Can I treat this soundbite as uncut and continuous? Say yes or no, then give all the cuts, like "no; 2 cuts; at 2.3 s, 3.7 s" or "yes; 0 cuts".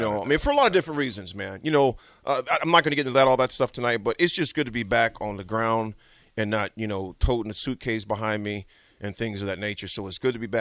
yes; 0 cuts